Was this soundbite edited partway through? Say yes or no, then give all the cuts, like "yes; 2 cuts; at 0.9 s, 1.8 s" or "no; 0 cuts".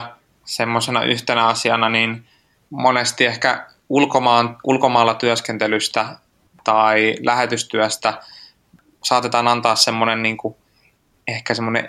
no; 0 cuts